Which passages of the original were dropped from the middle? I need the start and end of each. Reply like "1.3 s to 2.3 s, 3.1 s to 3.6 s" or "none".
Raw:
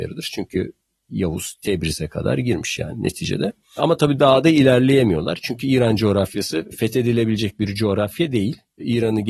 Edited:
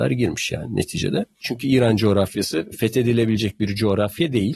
3.7 s to 5.4 s